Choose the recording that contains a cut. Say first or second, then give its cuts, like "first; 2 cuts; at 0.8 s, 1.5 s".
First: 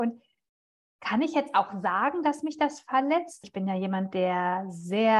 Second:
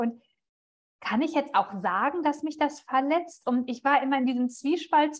first; 1 cut; at 3.4 s